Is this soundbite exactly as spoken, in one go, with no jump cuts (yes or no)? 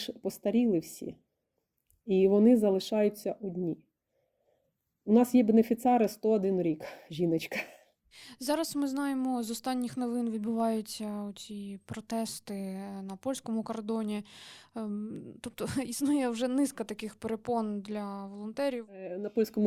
yes